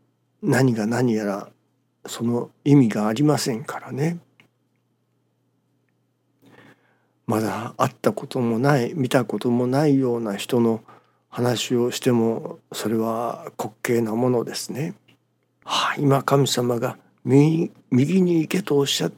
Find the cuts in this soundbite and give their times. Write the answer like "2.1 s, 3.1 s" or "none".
15.6 s